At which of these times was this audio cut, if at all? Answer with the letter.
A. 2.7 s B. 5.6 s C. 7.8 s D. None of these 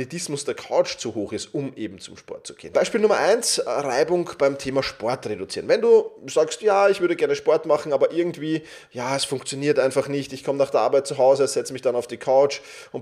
A